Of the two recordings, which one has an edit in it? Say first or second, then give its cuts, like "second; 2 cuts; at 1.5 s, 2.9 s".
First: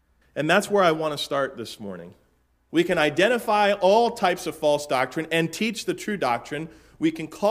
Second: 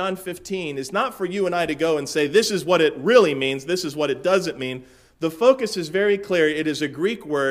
first; 1 cut; at 2.7 s